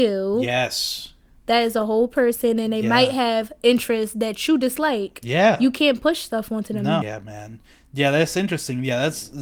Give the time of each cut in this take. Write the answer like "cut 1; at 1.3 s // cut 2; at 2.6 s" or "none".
cut 1; at 7.0 s